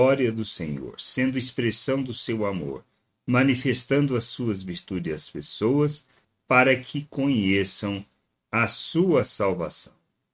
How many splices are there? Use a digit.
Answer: 0